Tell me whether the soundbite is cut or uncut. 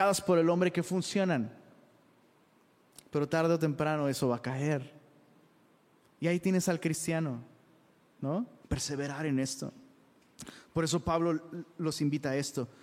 cut